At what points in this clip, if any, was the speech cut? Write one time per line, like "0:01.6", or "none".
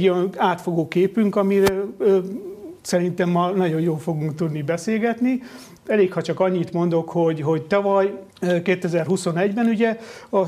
0:05.8
0:08.3